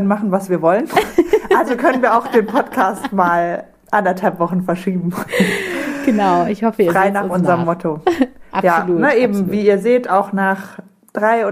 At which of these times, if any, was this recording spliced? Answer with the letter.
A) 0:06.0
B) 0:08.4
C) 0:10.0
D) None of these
D